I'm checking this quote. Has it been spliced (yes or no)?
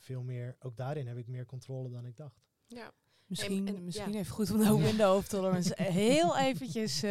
no